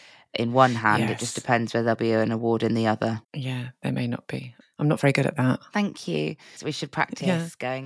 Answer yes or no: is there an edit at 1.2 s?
no